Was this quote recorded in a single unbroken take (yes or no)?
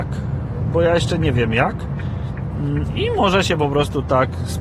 yes